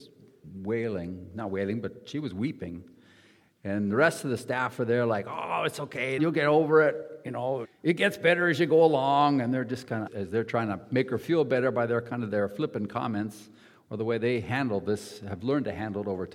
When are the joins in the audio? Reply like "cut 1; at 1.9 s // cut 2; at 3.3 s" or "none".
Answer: cut 1; at 6.2 s // cut 2; at 7.6 s // cut 3; at 10.1 s